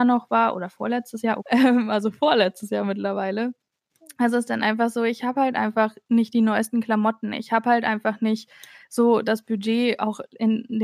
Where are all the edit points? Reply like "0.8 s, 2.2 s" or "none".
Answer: 1.4 s